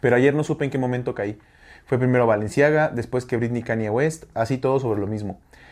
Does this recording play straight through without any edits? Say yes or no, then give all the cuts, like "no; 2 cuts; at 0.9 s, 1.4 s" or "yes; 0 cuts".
no; 1 cut; at 4.3 s